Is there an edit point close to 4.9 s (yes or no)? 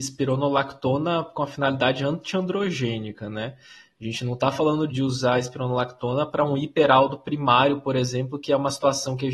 yes